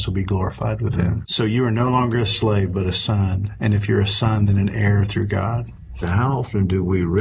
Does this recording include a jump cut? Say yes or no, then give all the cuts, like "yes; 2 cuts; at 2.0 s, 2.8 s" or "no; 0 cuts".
yes; 2 cuts; at 1.2 s, 6.0 s